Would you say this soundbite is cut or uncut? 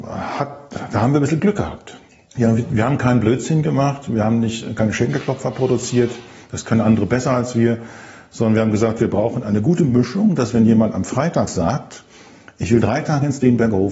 cut